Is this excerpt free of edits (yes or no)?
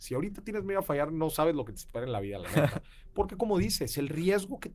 yes